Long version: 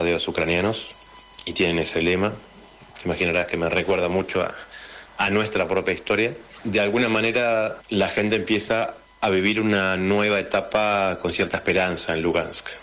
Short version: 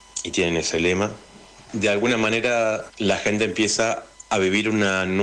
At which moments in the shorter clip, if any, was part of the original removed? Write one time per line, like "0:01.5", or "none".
0:01.7